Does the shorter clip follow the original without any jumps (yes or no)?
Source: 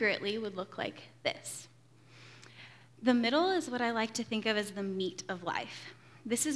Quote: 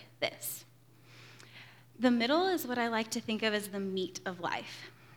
yes